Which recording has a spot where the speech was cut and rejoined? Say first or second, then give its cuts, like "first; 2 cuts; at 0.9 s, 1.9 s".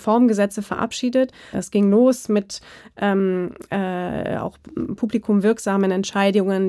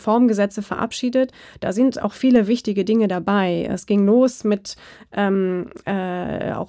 first; 1 cut; at 1.5 s